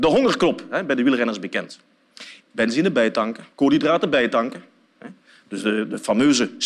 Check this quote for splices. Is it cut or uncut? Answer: cut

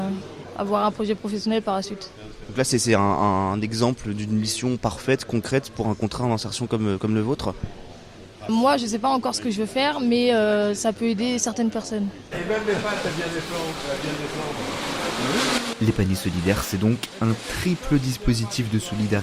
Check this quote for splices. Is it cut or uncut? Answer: cut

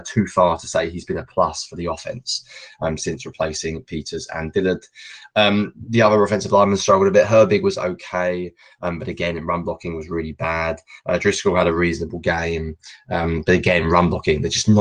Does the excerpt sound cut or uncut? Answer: uncut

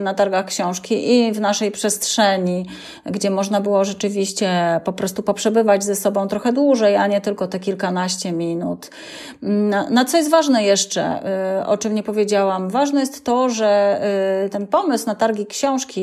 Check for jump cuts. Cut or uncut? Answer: uncut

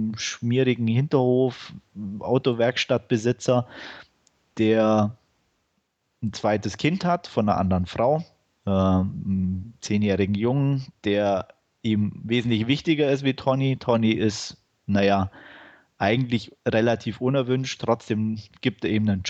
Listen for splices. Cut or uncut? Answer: uncut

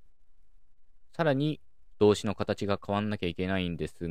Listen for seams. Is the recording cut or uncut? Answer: cut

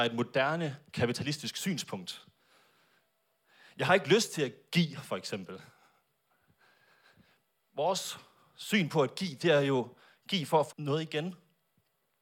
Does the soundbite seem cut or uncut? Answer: cut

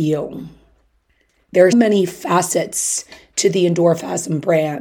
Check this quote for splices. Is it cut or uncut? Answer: cut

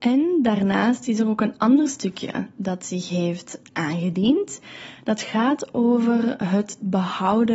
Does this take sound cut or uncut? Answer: uncut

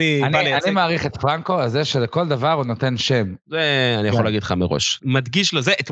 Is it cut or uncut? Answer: cut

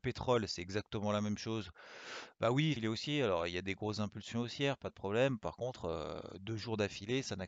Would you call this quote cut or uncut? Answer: cut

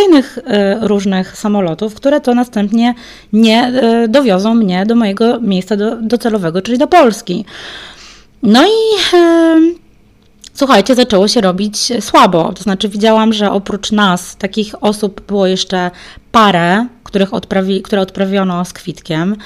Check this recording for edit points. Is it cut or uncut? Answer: uncut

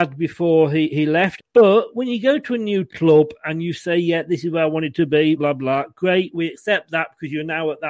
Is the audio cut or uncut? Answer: cut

